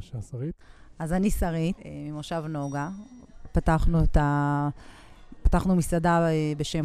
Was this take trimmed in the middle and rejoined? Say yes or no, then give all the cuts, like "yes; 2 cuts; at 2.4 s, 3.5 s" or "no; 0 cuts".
yes; 1 cut; at 1.8 s